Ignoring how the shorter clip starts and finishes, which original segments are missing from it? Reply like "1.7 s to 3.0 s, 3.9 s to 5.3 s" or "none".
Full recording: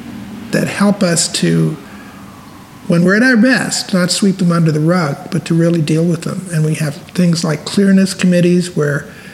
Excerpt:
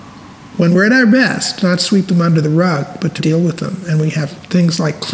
5.5 s to 5.8 s

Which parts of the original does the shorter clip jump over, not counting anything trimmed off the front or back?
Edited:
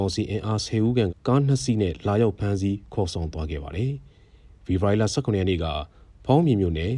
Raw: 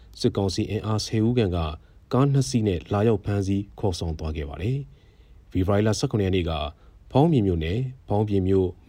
1.5 s to 1.9 s

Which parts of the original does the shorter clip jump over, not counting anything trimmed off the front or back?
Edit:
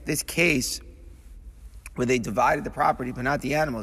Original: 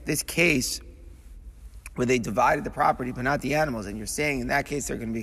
none

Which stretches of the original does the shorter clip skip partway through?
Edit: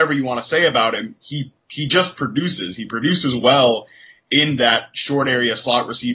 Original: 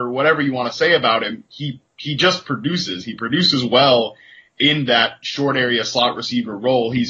none

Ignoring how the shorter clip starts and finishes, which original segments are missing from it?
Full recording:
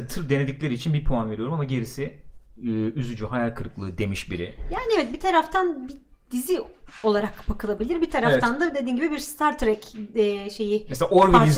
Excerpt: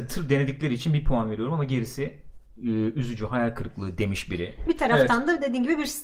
4.7 s to 8.0 s

